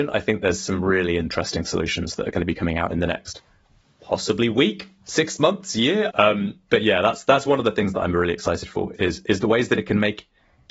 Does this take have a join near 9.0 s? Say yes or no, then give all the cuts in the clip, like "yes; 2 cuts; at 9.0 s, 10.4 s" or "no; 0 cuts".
yes; 2 cuts; at 6.1 s, 9.0 s